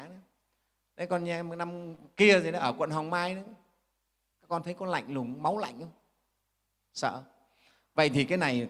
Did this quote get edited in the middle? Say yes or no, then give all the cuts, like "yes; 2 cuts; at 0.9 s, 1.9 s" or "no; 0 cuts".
yes; 1 cut; at 4.3 s